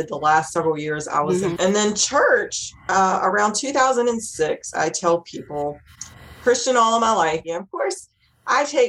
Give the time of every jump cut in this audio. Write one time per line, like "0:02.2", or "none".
0:01.6
0:07.4